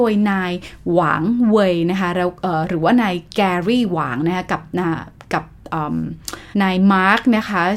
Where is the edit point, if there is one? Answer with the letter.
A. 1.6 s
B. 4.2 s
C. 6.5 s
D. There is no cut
C